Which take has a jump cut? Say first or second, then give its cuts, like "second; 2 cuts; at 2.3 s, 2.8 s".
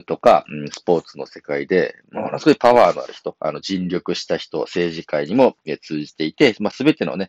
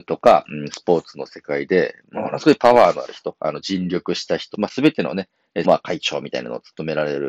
second; 2 cuts; at 4.5 s, 5.6 s